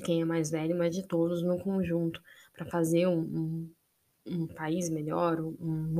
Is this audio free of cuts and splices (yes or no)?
yes